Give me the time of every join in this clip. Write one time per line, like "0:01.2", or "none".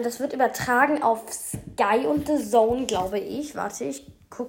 none

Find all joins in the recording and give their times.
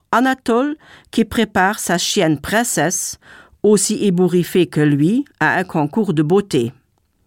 none

